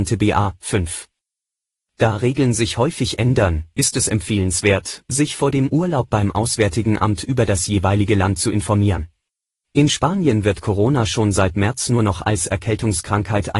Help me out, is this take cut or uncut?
cut